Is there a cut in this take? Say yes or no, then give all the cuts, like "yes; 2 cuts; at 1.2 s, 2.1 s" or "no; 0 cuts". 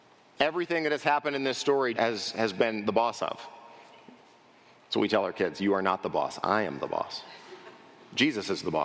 yes; 1 cut; at 1.9 s